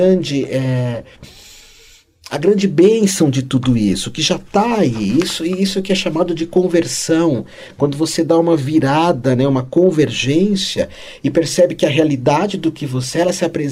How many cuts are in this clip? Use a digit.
0